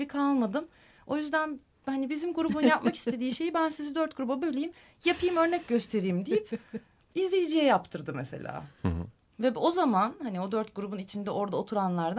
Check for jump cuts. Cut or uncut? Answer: uncut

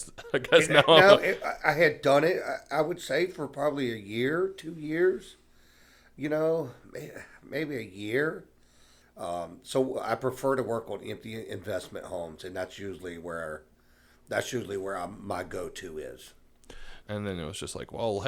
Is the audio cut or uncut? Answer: cut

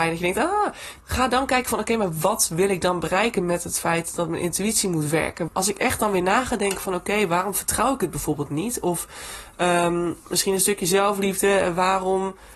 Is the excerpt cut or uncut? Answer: cut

